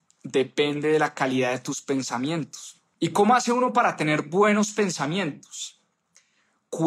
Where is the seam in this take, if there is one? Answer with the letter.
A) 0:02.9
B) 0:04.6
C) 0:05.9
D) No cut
A